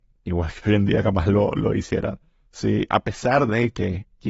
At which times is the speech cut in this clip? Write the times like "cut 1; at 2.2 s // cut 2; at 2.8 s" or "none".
none